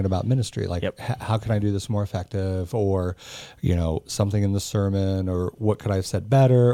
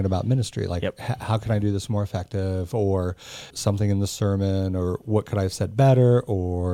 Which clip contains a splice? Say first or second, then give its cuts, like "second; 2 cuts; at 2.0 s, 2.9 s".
second; 1 cut; at 3.5 s